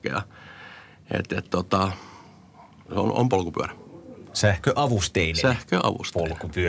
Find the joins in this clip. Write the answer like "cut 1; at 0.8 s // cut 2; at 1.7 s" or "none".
cut 1; at 2.9 s